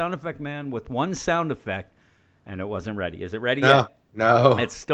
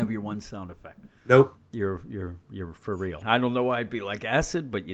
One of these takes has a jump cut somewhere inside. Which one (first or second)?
second